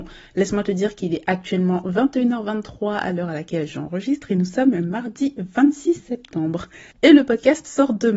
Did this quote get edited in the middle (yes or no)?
yes